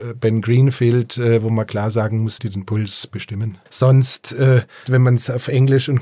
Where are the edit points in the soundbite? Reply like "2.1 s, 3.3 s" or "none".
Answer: 2.4 s, 3.7 s

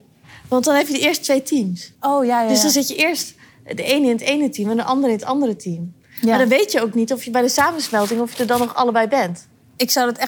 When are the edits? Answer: 2.0 s

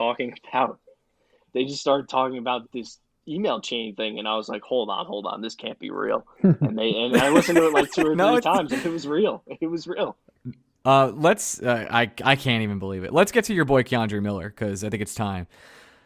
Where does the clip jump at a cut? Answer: 2.6 s, 10.8 s

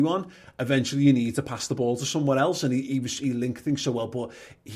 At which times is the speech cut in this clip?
none

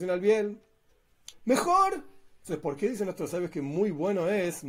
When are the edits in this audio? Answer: 1.3 s

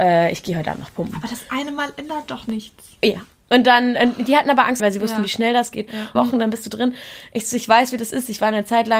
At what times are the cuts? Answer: 4.8 s, 6.2 s

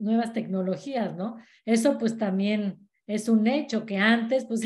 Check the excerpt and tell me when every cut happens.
none

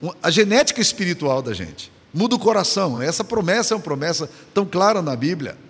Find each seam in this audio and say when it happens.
none

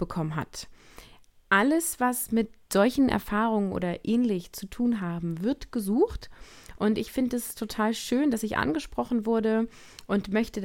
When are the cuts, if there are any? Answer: none

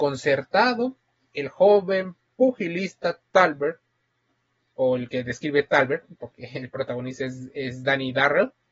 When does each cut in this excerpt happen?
none

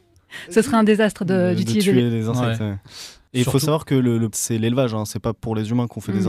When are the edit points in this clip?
4.3 s

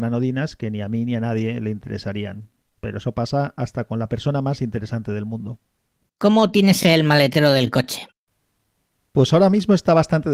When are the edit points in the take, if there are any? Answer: none

